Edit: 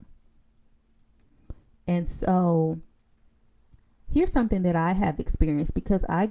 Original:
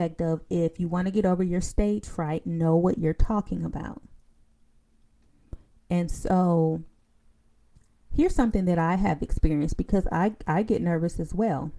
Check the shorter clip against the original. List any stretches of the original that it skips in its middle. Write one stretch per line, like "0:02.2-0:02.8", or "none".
none